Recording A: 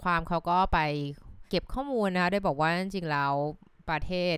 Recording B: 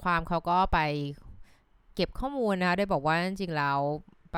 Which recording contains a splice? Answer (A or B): A